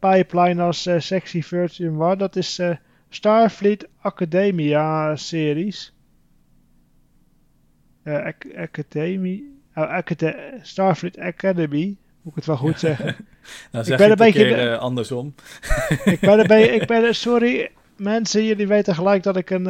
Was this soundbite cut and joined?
no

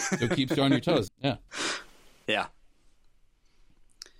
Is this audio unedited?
no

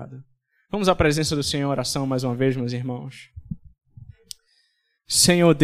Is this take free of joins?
yes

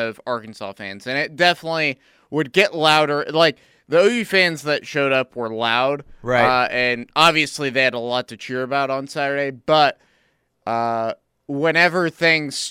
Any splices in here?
no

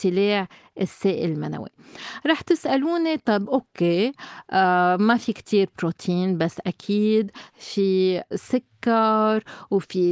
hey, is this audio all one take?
yes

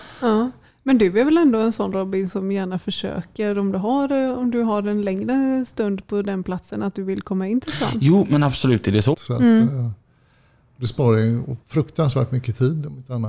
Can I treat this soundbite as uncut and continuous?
no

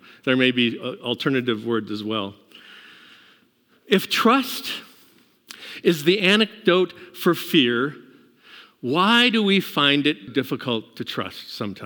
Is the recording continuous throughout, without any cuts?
no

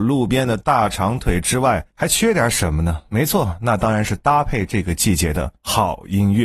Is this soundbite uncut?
yes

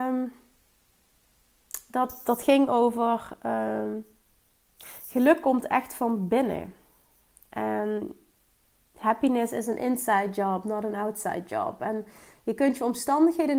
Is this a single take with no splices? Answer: yes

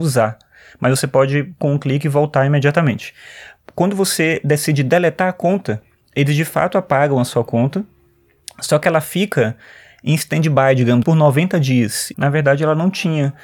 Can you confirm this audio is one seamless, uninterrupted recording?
no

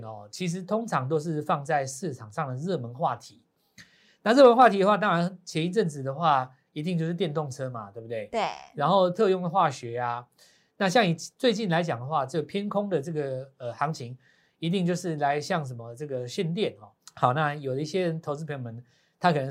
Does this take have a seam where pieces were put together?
yes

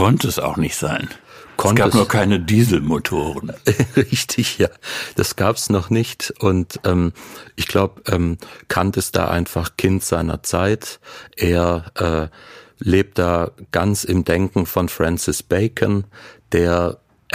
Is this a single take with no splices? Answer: yes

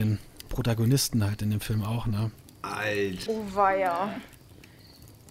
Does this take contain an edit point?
yes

